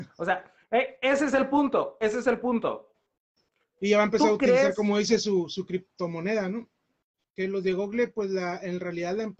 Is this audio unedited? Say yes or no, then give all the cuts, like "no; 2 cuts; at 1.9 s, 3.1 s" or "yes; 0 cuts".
no; 1 cut; at 7.2 s